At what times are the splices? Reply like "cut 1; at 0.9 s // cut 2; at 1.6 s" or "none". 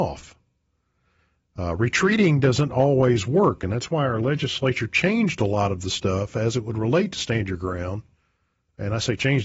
none